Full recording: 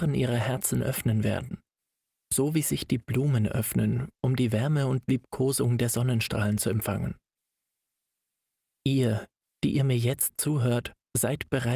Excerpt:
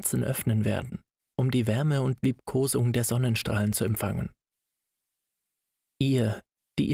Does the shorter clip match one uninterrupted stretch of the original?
no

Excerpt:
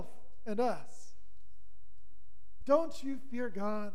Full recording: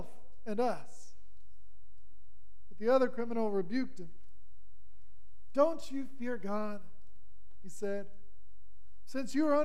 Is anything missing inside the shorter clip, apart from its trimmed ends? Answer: yes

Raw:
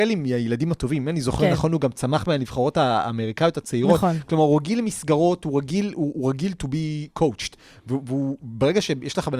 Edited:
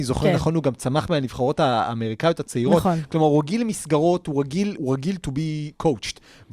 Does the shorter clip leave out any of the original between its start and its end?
yes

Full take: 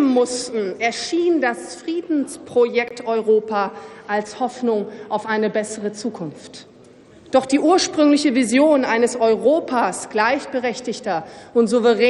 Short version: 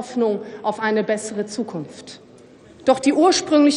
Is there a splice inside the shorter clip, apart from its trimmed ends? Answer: no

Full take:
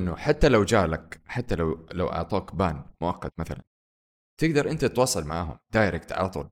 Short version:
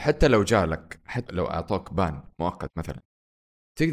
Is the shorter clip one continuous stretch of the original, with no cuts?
no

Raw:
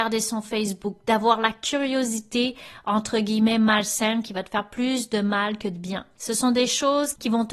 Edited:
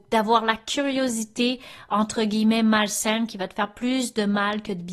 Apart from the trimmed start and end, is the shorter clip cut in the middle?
no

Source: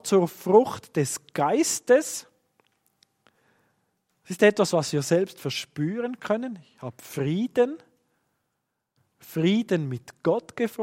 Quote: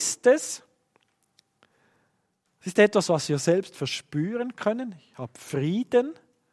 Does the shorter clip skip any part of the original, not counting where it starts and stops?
no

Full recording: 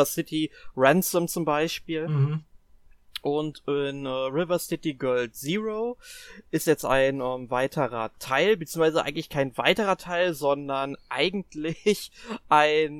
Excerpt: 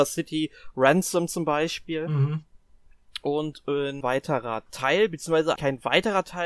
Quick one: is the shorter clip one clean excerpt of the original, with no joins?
no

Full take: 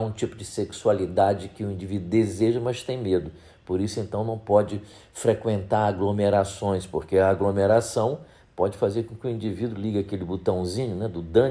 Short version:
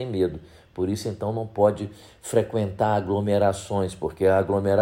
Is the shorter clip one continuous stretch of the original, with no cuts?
yes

